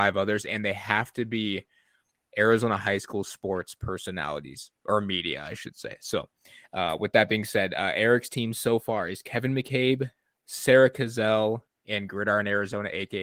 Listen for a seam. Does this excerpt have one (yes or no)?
no